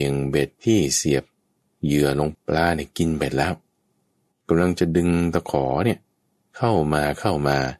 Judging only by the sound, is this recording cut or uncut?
cut